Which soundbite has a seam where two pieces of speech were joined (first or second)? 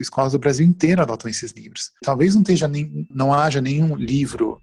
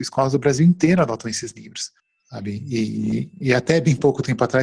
first